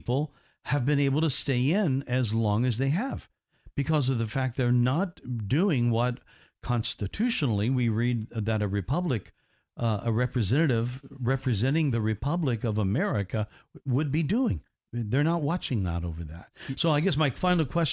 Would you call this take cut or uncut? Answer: uncut